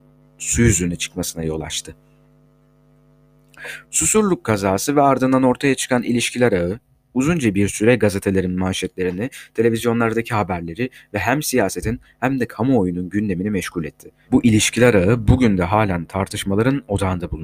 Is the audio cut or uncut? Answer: cut